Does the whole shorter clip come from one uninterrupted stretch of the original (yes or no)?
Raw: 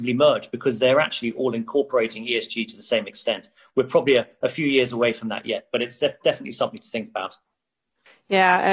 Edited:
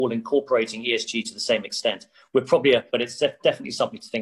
no